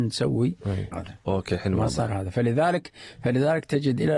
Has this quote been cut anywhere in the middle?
yes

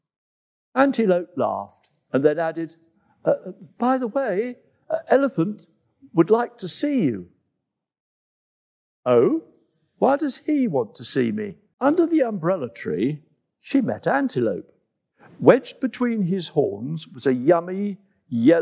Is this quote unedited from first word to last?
no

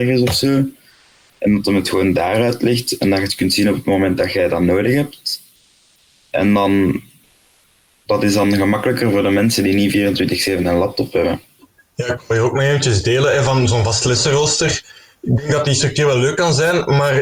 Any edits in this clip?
no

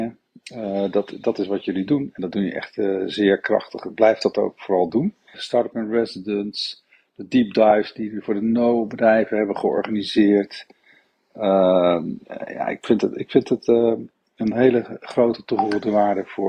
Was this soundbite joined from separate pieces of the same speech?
yes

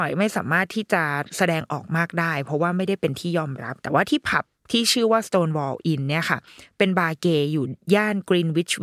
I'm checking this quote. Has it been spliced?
yes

